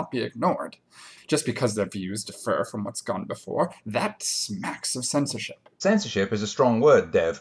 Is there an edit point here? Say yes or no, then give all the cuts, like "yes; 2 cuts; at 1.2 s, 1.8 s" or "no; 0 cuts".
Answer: yes; 1 cut; at 1.2 s